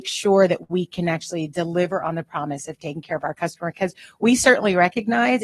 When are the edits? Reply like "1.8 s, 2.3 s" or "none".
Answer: none